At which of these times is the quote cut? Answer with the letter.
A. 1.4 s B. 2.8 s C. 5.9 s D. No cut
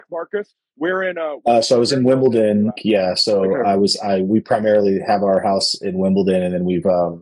B